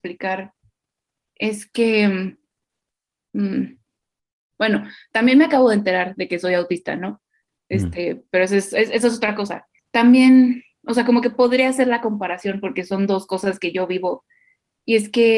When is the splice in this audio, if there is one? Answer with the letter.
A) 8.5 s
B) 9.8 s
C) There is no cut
C